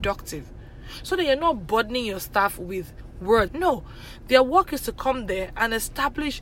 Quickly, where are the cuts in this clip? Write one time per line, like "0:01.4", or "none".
0:03.5